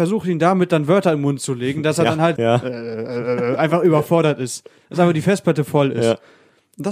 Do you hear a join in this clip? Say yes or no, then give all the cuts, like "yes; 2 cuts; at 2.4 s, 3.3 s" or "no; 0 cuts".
yes; 1 cut; at 2.4 s